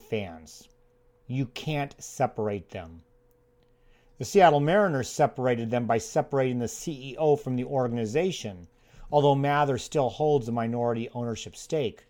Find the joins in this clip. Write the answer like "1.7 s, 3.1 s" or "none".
1.2 s